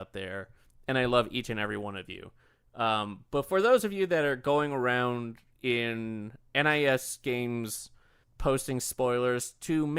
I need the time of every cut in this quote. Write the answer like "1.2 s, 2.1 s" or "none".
8.2 s